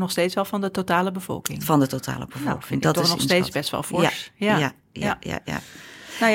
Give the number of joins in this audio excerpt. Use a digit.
0